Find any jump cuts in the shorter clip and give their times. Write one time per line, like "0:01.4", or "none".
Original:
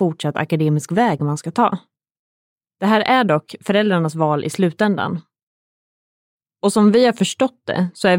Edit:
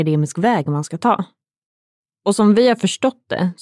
0:02.0